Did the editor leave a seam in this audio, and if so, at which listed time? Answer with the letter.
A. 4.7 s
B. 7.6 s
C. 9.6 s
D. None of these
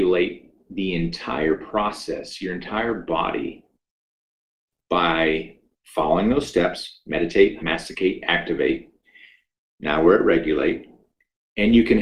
B